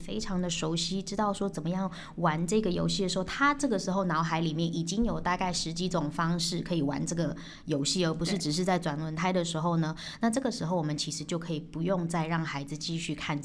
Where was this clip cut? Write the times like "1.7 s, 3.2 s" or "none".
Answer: none

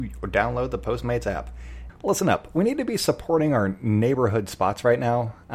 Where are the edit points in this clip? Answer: 1.9 s

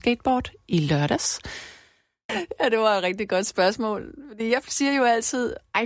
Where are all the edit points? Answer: 2.3 s

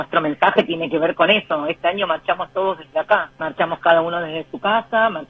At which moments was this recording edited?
3.3 s

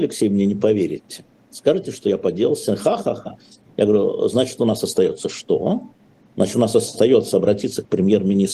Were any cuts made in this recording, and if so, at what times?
none

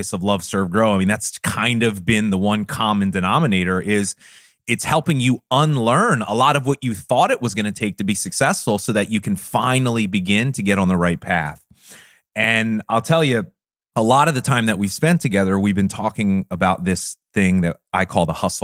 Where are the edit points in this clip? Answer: none

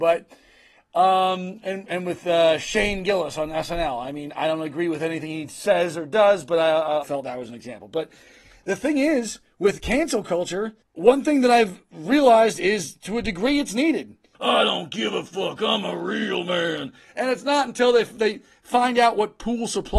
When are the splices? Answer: 7.0 s, 10.9 s, 14.3 s

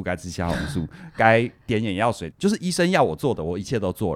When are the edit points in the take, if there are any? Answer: 2.3 s

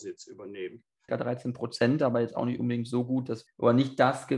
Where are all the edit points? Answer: 1.1 s, 3.5 s

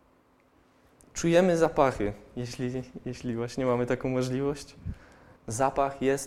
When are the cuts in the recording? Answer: 5.4 s

